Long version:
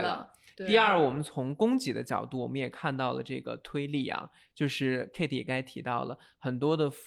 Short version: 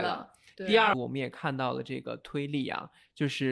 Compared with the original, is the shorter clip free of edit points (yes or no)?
no